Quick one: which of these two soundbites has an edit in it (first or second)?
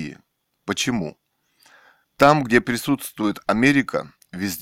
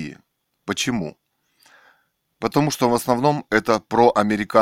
first